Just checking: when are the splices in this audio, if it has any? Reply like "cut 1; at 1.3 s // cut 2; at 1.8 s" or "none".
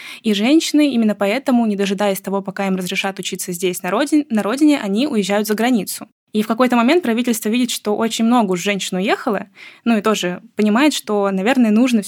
none